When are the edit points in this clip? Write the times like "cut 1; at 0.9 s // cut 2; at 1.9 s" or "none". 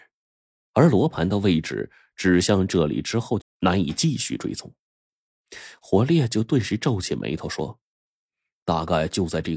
cut 1; at 3.4 s

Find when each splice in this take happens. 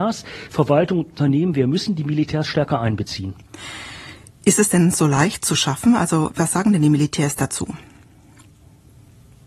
none

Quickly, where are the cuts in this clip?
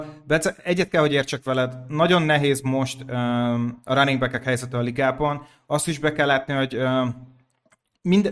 none

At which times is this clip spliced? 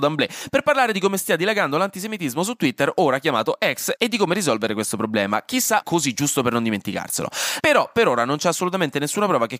cut 1; at 5.8 s // cut 2; at 7.6 s

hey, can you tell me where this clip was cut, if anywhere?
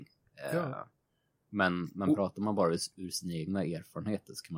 none

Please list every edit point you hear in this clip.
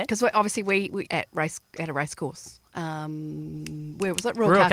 cut 1; at 1.1 s

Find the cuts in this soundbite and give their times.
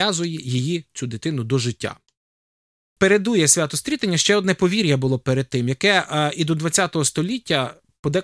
none

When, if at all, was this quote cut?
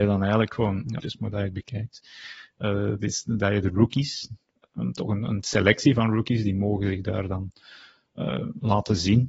cut 1; at 1.0 s

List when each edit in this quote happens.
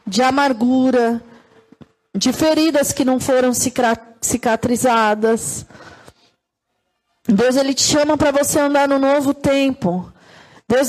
none

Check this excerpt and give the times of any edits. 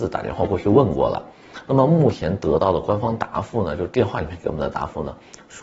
none

